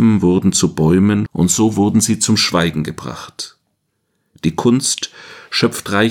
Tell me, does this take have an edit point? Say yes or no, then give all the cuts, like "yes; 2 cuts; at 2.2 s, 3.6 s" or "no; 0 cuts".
yes; 1 cut; at 1.3 s